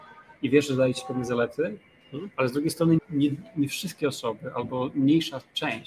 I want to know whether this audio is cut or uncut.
cut